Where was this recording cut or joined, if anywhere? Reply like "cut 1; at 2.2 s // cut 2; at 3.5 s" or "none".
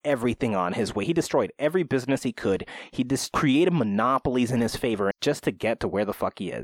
cut 1; at 3.3 s // cut 2; at 5.1 s